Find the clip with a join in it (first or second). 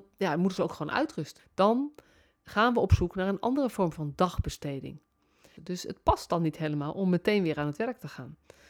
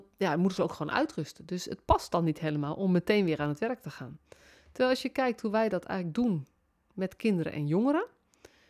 first